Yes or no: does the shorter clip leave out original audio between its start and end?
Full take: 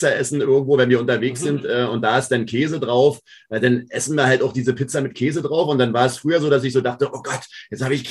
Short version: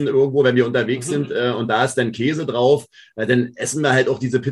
no